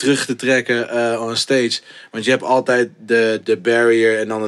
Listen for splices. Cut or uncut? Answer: cut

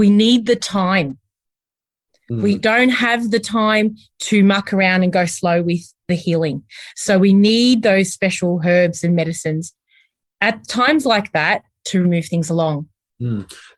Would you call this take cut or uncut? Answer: cut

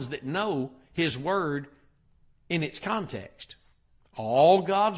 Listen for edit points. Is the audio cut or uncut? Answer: uncut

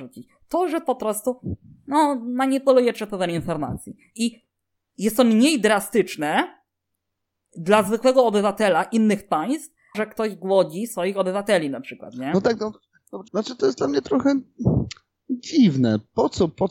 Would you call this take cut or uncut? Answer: cut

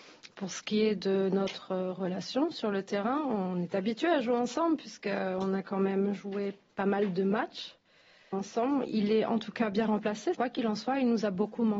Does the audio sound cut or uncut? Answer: cut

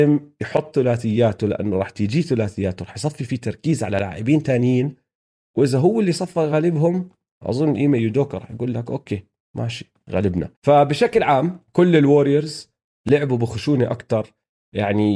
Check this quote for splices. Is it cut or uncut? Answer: cut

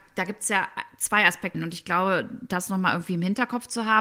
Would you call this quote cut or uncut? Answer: cut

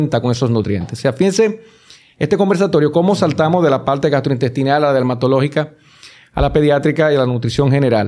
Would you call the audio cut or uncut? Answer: cut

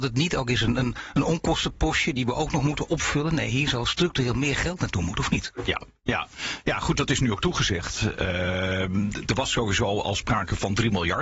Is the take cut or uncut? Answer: uncut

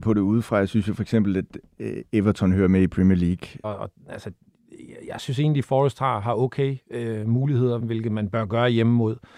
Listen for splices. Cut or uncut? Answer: cut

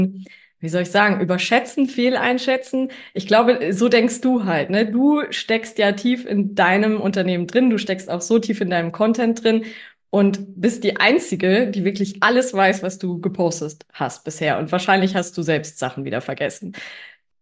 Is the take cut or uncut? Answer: uncut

